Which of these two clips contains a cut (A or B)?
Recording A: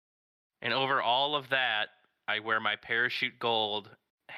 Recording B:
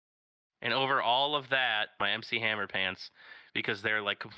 B